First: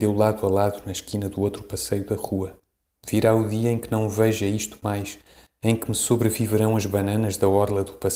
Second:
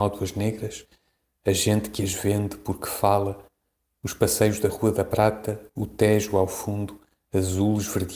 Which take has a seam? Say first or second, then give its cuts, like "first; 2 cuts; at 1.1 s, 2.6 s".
first; 1 cut; at 2.9 s